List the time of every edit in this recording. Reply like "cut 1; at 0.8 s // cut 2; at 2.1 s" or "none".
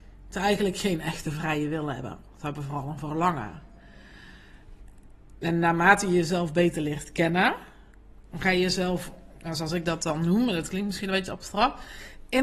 none